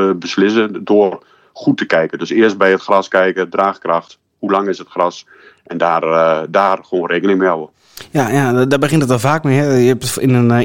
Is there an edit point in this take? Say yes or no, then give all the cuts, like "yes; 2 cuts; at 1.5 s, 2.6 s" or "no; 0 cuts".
no; 0 cuts